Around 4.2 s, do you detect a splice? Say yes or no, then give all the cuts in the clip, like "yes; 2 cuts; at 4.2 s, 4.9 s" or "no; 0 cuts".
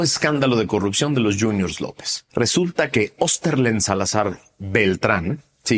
no; 1 cut; at 2.3 s